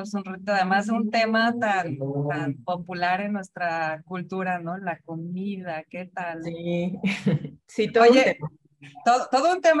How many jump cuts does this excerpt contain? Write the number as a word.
zero